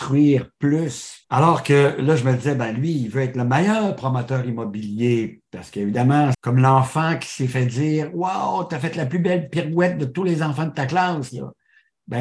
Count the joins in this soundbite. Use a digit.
2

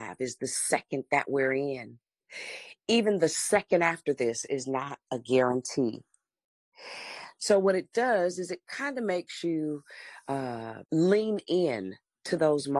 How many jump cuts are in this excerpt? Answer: 1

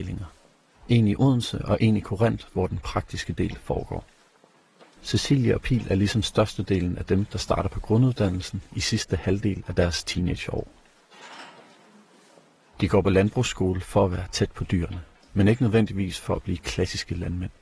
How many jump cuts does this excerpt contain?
1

